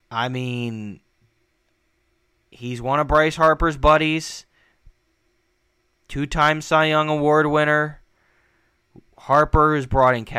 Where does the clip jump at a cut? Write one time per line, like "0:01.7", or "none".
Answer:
none